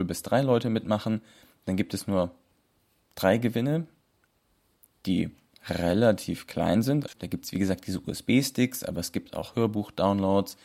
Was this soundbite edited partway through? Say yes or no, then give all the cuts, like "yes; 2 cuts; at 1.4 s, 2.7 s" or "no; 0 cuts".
yes; 1 cut; at 7.1 s